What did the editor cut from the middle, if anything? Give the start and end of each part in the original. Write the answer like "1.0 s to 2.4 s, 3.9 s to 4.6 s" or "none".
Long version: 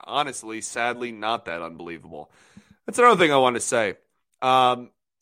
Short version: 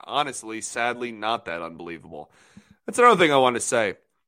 none